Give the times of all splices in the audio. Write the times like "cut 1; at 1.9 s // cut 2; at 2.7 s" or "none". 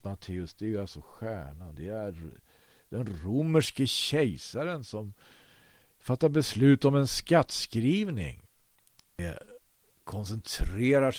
cut 1; at 1.8 s // cut 2; at 9.1 s